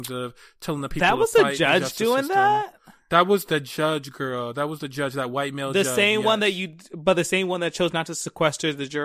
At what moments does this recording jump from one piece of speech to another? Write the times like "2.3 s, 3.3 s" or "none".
none

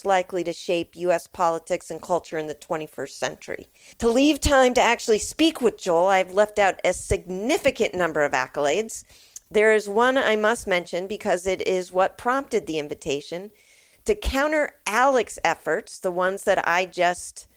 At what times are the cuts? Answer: 3.9 s

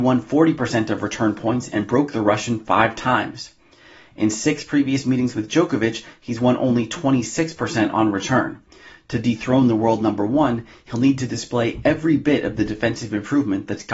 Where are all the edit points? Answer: none

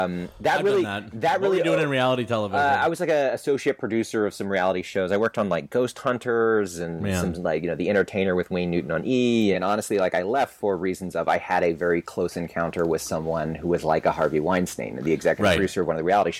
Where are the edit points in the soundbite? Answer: 9.5 s

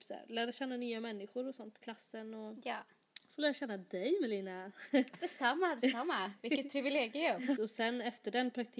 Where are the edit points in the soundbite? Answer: 5.1 s, 7.6 s

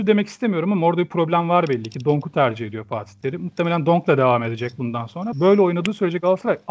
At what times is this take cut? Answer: 5.3 s

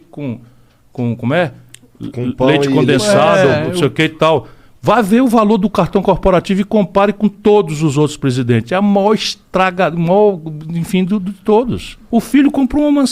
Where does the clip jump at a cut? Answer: none

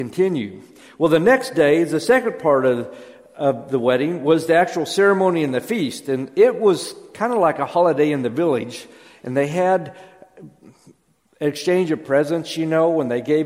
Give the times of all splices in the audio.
none

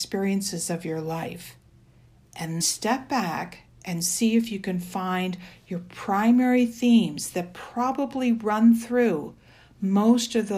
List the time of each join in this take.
2.6 s

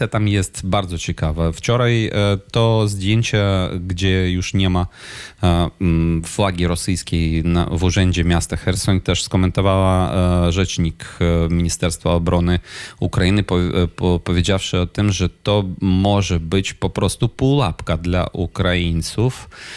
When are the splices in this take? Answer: none

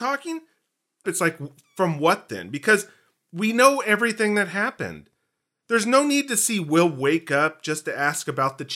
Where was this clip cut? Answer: 1.0 s

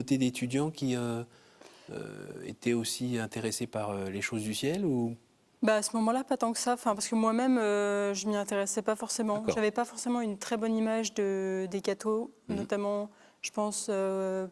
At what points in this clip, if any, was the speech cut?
none

